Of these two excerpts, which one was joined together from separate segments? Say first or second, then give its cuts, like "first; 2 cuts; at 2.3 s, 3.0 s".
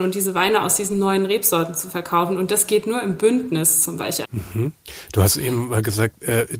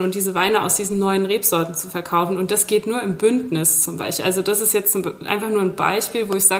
first; 1 cut; at 4.2 s